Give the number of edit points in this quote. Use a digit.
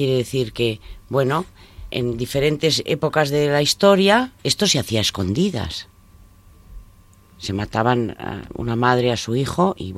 2